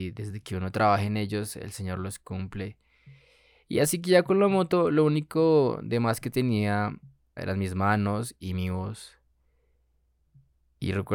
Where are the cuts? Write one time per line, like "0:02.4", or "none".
0:07.4